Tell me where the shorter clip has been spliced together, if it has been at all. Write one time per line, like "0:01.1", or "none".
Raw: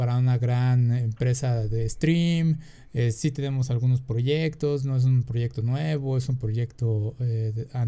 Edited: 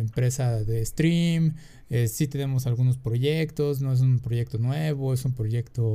none